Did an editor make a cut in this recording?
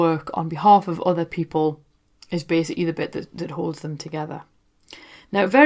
no; 0 cuts

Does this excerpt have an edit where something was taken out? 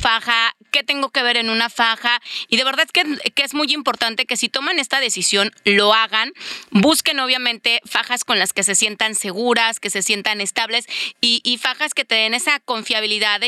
no; 0 cuts

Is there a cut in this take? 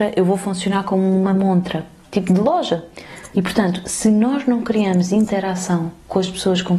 yes; 1 cut; at 3.3 s

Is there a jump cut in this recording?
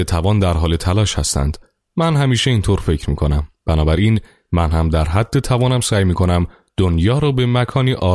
no; 0 cuts

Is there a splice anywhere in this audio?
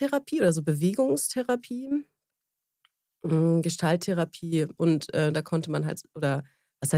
yes; 1 cut; at 4.8 s

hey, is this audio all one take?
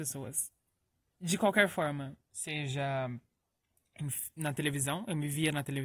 yes; 0 cuts

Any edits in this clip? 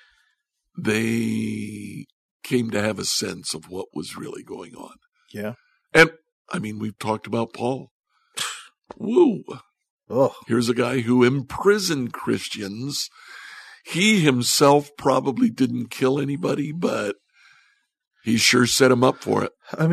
no; 0 cuts

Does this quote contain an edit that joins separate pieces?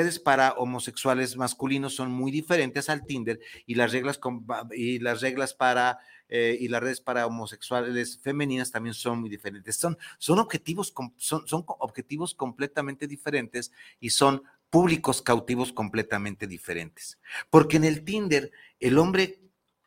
no; 0 cuts

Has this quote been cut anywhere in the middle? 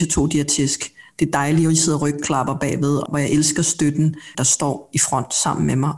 yes; 2 cuts; at 3.1 s, 4.3 s

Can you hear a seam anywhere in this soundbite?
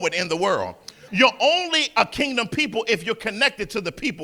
yes; 1 cut; at 1.1 s

